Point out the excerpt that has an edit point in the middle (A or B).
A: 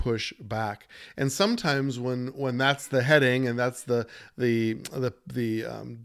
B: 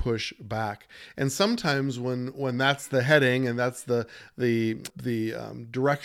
B